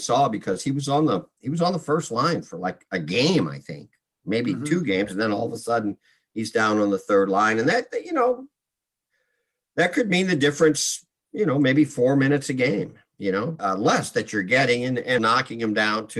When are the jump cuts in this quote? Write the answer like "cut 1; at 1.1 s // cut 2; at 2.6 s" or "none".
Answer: cut 1; at 13.6 s // cut 2; at 15.2 s